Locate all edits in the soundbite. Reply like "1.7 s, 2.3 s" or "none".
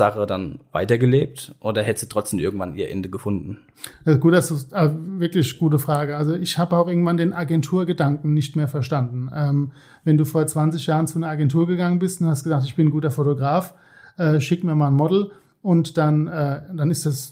none

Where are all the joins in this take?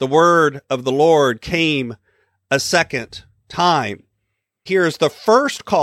4.7 s

